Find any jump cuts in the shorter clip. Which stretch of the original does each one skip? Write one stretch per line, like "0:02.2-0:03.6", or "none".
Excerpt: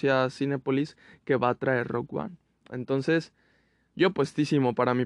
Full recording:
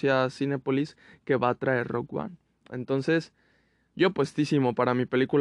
none